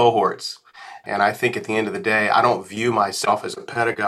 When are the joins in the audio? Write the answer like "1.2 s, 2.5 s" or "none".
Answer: 1.0 s